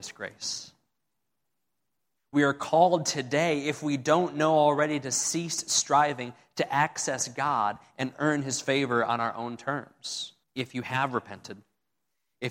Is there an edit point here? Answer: yes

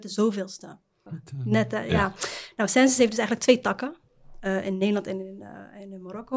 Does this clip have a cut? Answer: yes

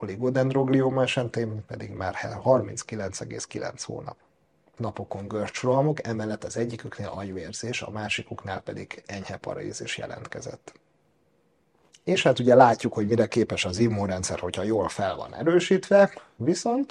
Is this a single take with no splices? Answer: no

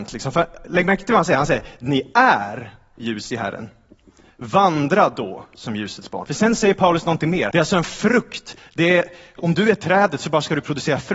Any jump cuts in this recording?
yes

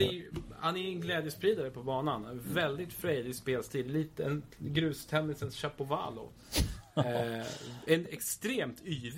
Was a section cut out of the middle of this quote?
no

